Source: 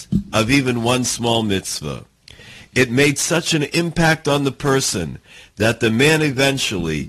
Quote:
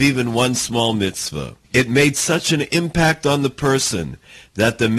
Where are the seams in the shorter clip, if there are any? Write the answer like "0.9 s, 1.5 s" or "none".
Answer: 1.6 s